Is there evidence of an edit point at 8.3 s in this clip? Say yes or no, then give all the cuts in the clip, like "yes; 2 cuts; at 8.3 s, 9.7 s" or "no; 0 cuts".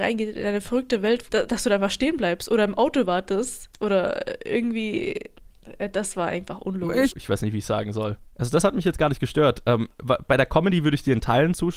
no; 2 cuts; at 1.3 s, 7.1 s